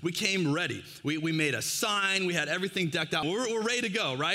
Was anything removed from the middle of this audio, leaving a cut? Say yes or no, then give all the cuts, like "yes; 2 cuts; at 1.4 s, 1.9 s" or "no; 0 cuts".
yes; 1 cut; at 3.2 s